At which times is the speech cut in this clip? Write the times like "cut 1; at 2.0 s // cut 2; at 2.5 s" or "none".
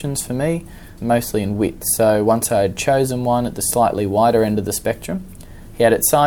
cut 1; at 1.0 s